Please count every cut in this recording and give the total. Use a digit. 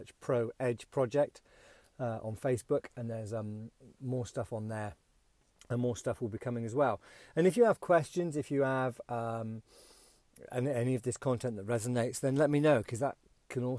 0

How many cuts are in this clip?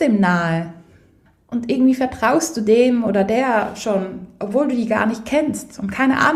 0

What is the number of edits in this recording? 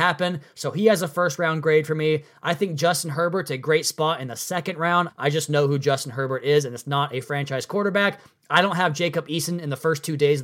1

